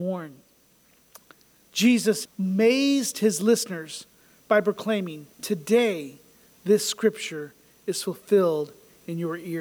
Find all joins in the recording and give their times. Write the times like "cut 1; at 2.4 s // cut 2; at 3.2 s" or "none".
cut 1; at 2.2 s // cut 2; at 5.3 s

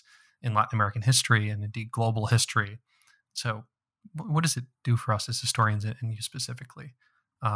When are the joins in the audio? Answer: none

